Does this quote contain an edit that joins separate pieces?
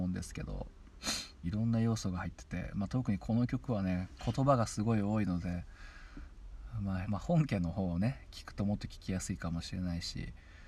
yes; 2 cuts; at 1.4 s, 7.0 s

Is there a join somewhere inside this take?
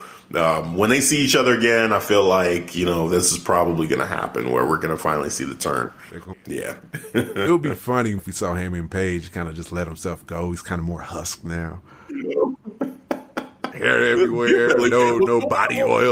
yes; 3 cuts; at 6.3 s, 8.2 s, 12.1 s

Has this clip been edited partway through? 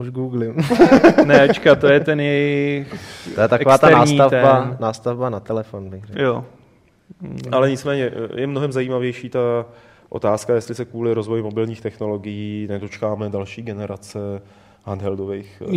no; 0 cuts

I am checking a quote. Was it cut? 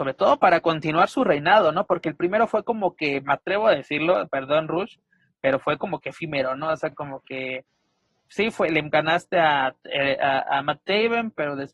no; 0 cuts

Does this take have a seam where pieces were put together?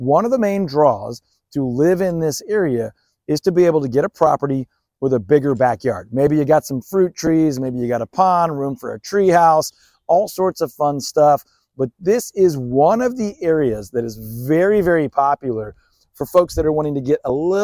no; 0 cuts

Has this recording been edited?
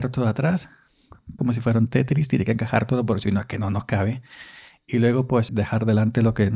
yes; 2 cuts; at 1.4 s, 5.5 s

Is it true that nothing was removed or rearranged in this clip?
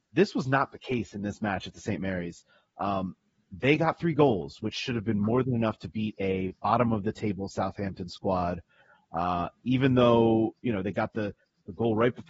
yes; 0 cuts

